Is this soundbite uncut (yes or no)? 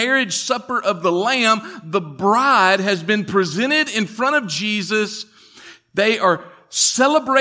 yes